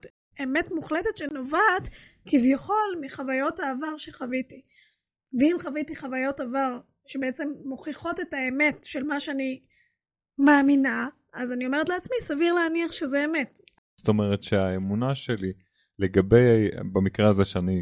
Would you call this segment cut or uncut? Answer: uncut